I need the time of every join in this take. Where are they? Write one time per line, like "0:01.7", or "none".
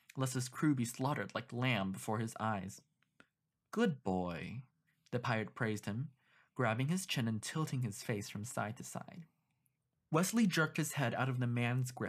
none